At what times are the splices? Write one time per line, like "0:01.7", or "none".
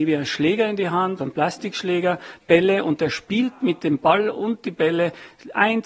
0:01.2